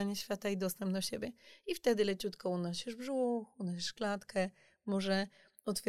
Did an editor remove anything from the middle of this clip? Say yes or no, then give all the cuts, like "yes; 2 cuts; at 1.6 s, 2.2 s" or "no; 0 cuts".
no; 0 cuts